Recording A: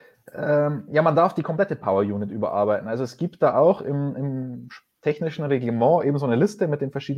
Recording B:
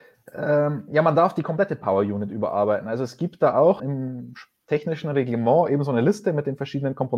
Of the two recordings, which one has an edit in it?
B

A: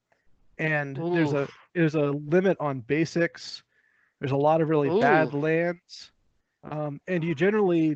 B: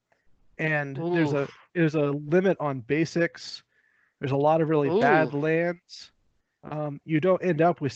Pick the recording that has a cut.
B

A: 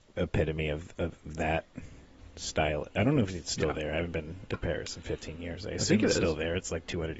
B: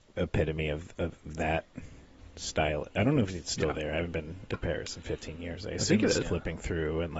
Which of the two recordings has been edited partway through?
B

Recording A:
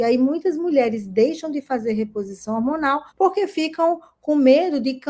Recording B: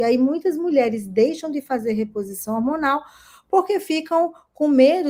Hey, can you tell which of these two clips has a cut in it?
A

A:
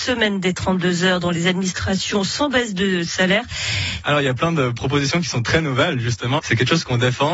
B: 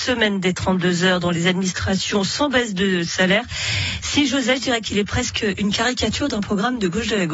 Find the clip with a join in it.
A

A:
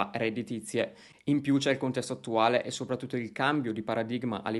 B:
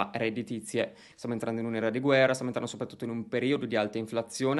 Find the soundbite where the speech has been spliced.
B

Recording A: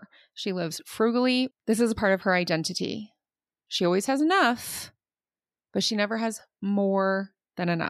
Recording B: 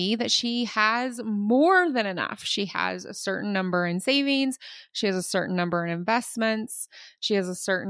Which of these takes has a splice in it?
A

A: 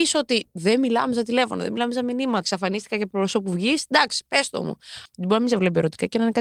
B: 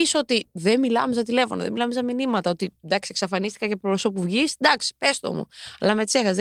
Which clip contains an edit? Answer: A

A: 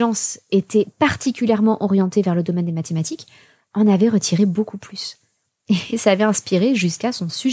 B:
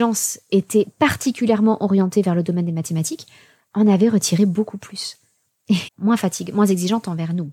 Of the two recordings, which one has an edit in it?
B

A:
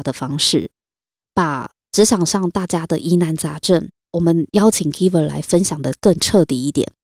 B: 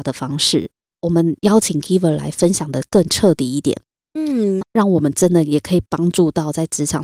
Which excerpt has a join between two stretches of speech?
B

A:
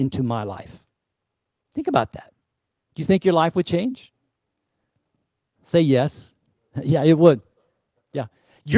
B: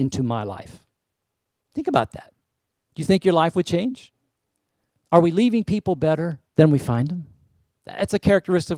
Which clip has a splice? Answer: B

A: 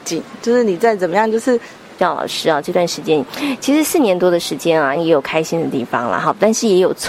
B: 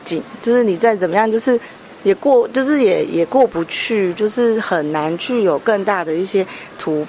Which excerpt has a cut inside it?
A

